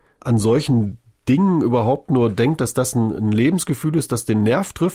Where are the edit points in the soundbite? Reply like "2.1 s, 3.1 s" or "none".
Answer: none

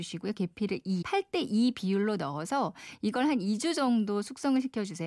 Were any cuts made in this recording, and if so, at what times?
1.0 s

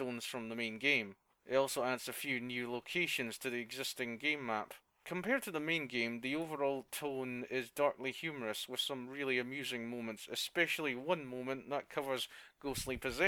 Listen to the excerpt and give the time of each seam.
1.3 s

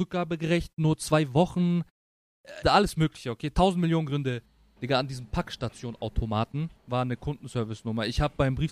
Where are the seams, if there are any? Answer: 2.6 s, 4.8 s, 6.8 s

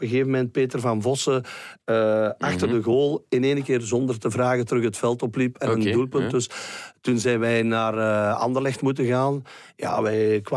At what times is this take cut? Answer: none

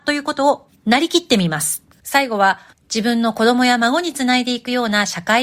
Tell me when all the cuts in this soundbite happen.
2.0 s

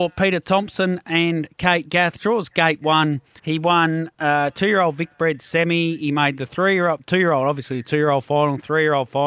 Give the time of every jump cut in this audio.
3.4 s

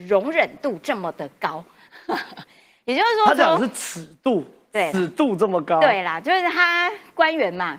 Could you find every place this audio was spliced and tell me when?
none

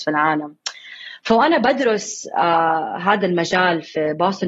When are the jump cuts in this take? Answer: none

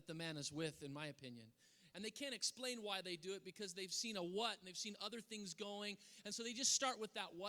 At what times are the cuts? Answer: 1.9 s

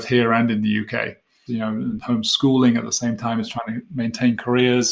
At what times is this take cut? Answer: 1.5 s

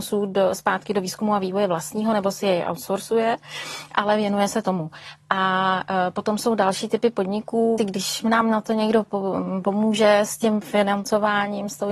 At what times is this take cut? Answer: 7.8 s

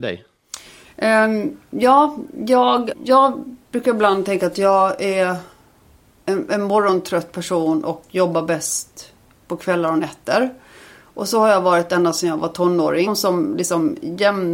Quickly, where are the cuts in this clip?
2.9 s, 13.1 s

